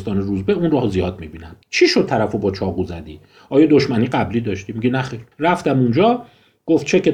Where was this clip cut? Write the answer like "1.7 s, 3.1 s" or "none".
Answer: 1.6 s, 5.3 s